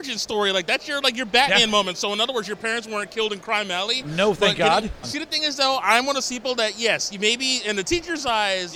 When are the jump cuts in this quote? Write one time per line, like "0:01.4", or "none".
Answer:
0:05.0